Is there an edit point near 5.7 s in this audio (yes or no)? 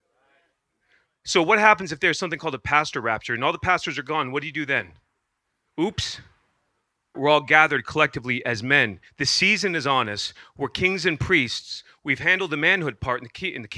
no